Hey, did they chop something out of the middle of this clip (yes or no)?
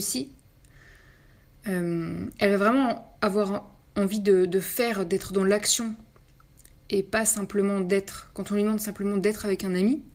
no